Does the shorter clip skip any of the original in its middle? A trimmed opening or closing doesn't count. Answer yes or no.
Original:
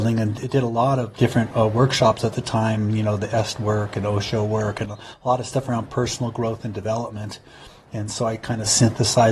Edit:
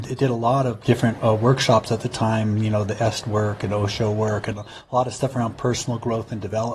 no